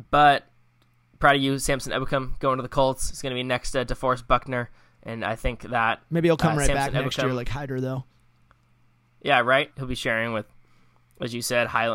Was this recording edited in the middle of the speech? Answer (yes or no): yes